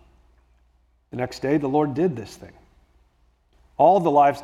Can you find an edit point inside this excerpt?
no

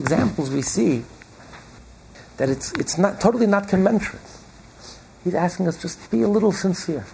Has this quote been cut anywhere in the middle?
yes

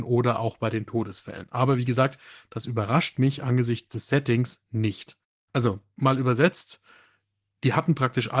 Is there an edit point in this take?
yes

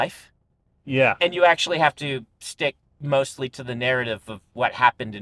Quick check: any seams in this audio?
no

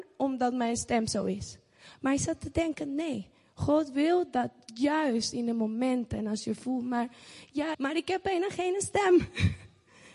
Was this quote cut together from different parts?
yes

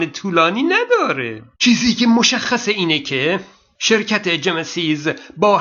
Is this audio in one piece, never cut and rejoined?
no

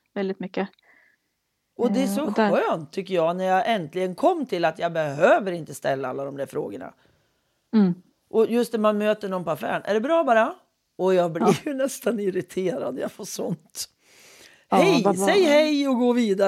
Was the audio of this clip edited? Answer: no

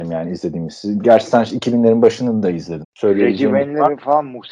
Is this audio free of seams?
no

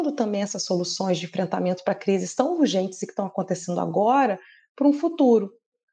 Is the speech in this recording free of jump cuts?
yes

